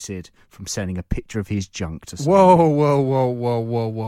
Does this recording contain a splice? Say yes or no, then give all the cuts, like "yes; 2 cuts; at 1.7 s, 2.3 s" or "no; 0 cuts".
no; 0 cuts